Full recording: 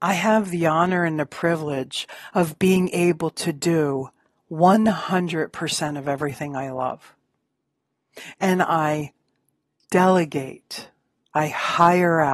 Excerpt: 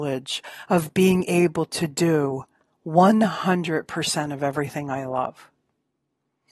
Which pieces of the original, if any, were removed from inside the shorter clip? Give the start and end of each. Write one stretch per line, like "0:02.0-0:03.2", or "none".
none